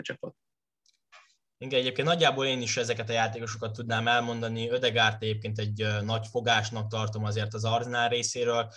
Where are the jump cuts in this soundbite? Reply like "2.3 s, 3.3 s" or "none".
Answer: 1.6 s